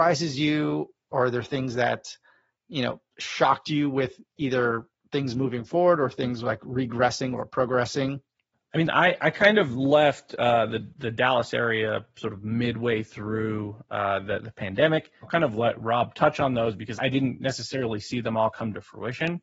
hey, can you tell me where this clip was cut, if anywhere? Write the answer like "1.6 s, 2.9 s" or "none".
15.2 s, 17.0 s